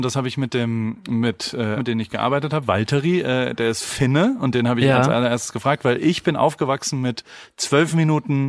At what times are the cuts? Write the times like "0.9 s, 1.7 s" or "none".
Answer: 1.8 s